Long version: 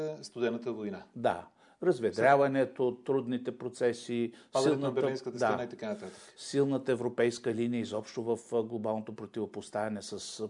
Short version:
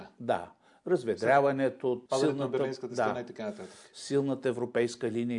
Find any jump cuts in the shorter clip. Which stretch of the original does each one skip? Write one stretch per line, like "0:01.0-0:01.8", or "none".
0:03.0-0:04.5